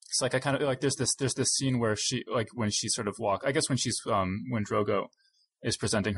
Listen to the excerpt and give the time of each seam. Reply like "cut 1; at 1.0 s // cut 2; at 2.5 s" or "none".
none